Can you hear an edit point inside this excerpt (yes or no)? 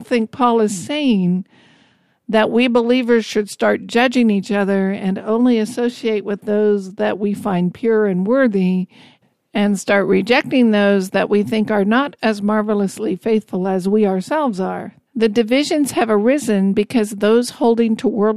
yes